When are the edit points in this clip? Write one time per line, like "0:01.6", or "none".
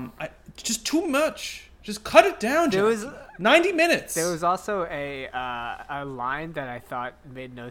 none